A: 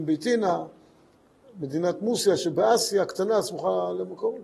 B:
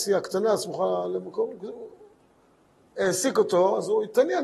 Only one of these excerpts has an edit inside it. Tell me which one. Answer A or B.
B